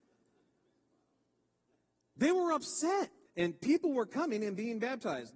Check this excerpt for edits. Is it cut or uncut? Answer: cut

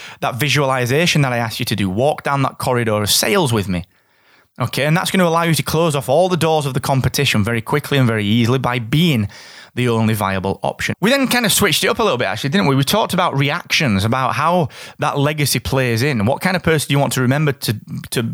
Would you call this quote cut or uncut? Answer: cut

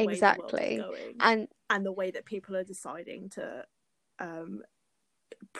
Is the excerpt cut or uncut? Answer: uncut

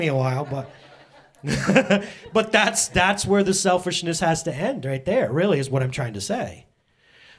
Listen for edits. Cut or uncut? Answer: uncut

